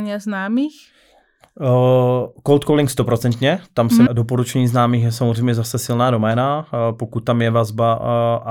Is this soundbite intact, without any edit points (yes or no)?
no